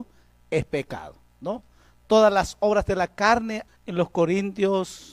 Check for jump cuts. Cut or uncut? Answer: cut